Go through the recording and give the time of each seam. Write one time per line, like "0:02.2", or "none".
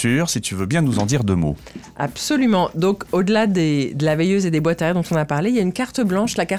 none

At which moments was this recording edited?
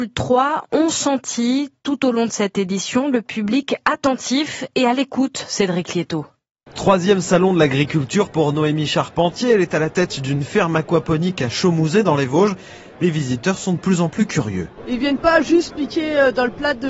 none

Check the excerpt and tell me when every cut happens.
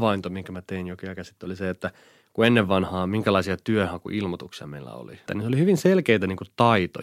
0:05.3

